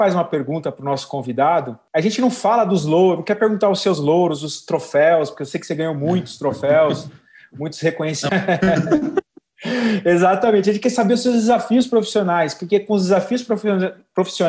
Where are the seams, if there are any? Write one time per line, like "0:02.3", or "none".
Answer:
0:08.3